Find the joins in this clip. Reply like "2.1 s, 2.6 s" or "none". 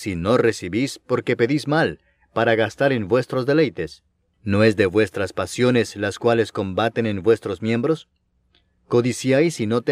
4.3 s